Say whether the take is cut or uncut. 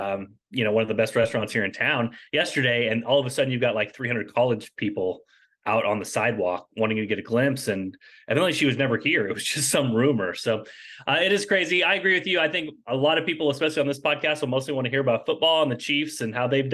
uncut